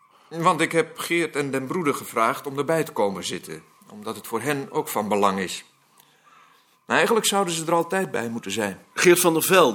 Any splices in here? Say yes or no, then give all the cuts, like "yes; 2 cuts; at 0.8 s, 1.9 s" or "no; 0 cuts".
no; 0 cuts